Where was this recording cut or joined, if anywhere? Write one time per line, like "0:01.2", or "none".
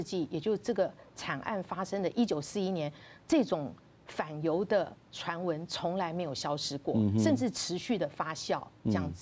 none